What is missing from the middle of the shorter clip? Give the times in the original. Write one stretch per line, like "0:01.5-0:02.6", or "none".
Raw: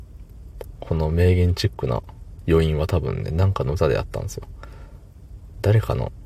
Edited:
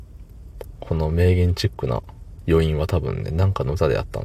none